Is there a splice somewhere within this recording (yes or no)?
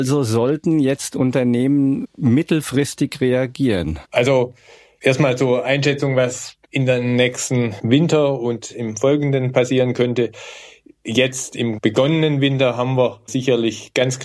yes